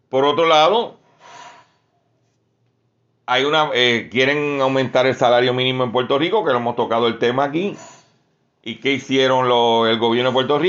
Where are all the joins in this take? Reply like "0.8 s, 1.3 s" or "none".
none